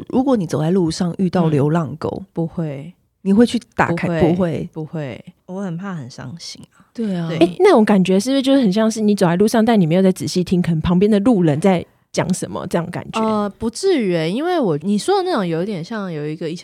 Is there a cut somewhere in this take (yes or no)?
yes